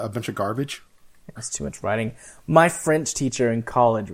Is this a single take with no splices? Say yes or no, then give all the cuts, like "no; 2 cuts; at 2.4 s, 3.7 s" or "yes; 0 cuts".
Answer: no; 1 cut; at 1.4 s